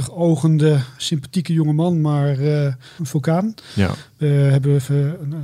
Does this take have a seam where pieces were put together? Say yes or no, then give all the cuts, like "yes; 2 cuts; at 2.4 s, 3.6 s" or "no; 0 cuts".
yes; 1 cut; at 3.0 s